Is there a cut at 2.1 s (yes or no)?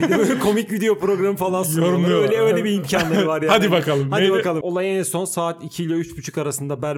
no